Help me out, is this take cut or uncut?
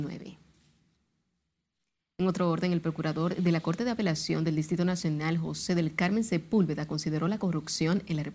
uncut